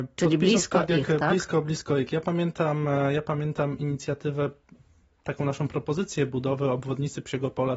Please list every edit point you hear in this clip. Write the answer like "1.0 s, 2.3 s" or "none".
none